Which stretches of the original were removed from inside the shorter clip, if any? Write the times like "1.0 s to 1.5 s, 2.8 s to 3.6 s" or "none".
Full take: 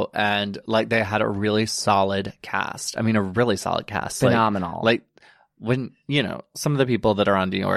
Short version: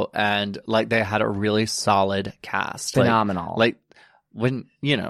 2.9 s to 4.2 s